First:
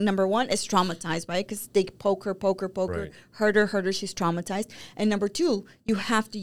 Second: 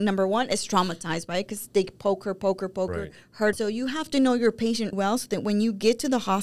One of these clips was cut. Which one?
second; 2 cuts; at 3.5 s, 4.9 s

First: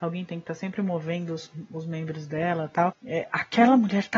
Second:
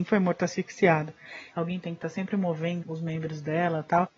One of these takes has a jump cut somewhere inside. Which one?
second; 2 cuts; at 1.5 s, 2.8 s

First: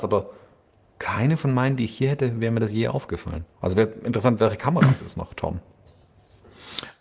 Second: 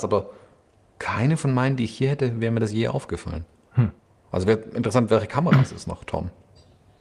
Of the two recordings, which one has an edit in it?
first; 1 cut; at 3.5 s

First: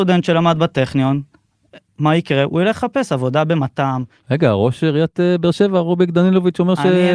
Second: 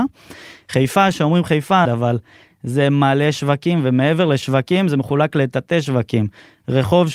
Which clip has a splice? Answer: second; 1 cut; at 1.8 s

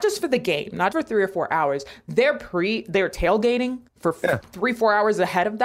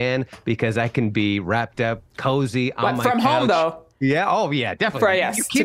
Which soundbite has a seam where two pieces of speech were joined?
first; 2 cuts; at 0.9 s, 3.9 s

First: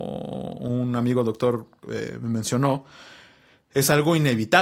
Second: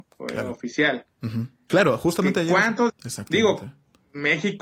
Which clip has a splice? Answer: second; 2 cuts; at 1.7 s, 2.9 s

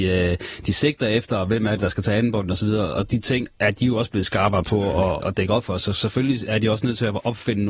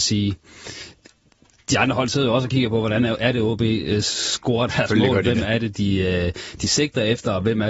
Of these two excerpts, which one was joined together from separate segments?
first; 1 cut; at 5.2 s

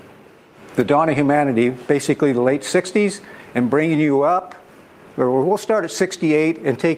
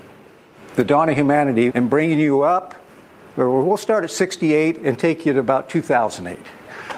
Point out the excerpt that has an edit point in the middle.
second; 1 cut; at 1.7 s

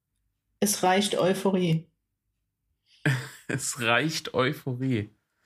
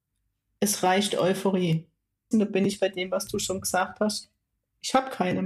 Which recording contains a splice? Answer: second; 1 cut; at 2.3 s

